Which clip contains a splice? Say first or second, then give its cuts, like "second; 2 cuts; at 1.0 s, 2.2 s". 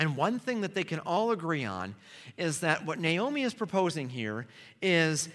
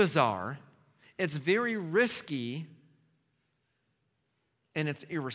second; 1 cut; at 1.0 s